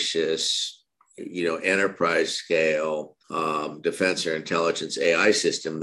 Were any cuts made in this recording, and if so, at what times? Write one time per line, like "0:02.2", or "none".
0:03.2